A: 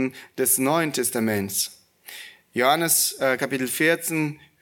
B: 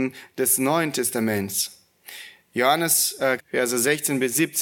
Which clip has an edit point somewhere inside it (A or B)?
B